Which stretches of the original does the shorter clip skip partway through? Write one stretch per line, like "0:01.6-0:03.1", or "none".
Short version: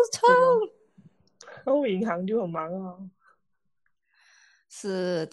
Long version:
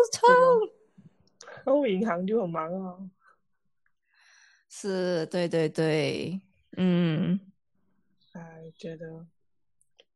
none